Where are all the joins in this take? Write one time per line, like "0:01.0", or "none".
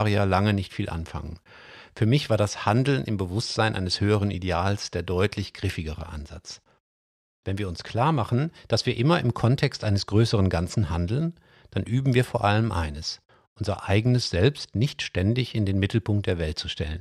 none